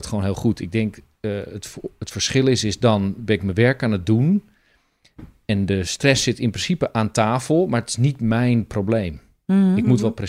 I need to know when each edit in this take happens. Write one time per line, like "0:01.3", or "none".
none